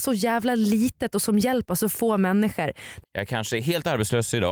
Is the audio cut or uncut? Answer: cut